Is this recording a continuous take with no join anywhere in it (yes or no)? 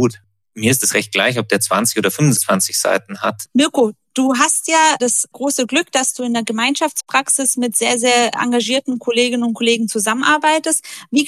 no